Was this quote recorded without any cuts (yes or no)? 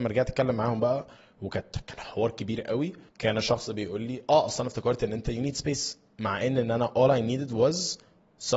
no